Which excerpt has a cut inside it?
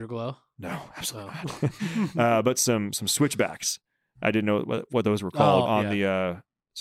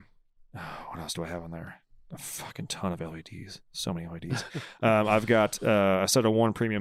first; 1 cut; at 5.6 s

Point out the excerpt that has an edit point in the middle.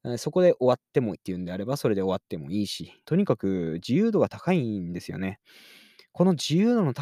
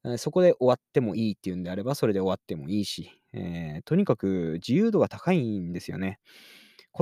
first; 2 cuts; at 1.1 s, 3.0 s

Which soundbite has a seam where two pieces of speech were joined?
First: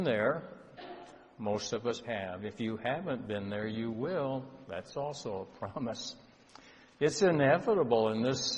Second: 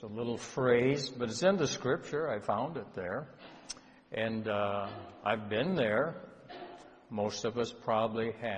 first; 1 cut; at 2.0 s

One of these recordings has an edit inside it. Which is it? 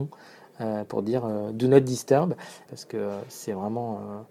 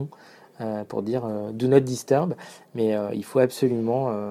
first; 1 cut; at 2.7 s

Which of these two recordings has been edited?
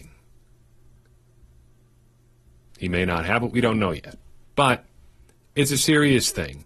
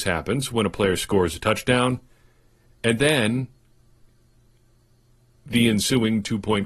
first; 1 cut; at 2.7 s

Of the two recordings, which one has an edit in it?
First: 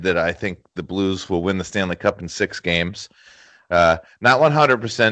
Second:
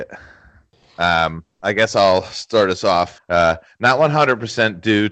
second; 1 cut; at 3.2 s

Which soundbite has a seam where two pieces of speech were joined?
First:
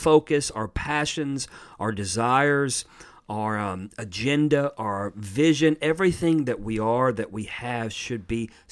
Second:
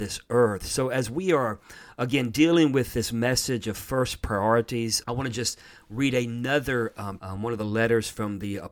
second; 2 cuts; at 5.0 s, 7.2 s

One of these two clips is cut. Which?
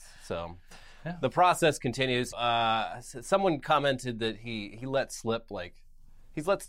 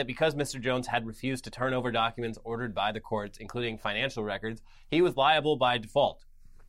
first; 1 cut; at 2.3 s

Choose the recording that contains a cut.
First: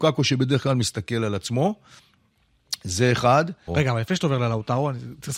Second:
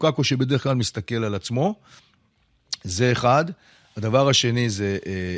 first; 1 cut; at 3.7 s

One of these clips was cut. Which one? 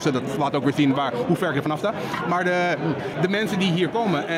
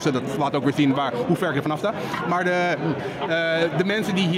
first; 1 cut; at 3.1 s

